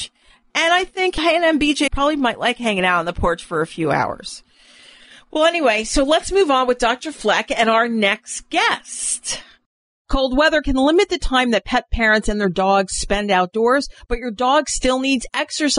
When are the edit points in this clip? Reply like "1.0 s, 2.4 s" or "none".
1.9 s